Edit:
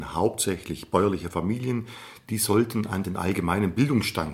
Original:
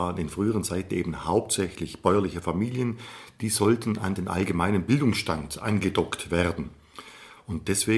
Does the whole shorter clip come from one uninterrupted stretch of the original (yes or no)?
yes